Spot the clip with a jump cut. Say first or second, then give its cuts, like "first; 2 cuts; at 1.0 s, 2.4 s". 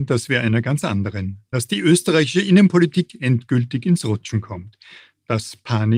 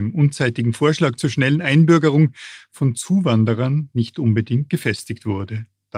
first; 1 cut; at 1.5 s